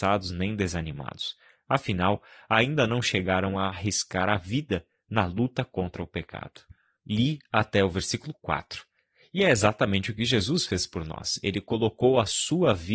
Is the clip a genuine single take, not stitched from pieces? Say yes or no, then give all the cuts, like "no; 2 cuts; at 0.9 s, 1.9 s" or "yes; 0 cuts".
yes; 0 cuts